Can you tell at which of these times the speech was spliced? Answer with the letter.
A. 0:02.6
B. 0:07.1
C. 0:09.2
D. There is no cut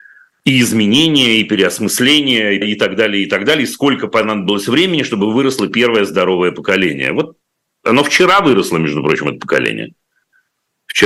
A